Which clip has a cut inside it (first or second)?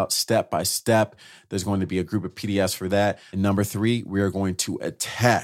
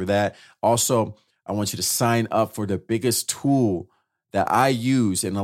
first